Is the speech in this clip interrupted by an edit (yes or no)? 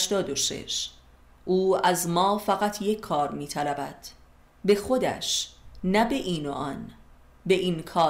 yes